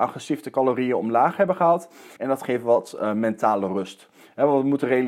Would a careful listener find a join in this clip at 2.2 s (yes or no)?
yes